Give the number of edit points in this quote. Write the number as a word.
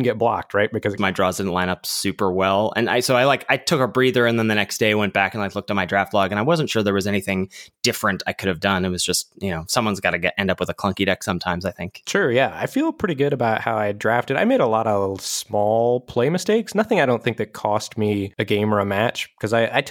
one